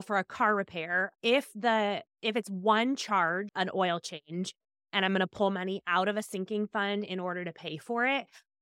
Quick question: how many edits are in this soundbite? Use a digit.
1